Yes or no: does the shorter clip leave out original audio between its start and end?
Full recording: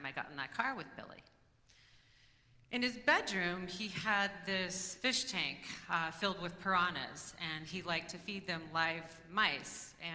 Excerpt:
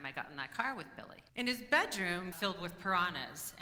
yes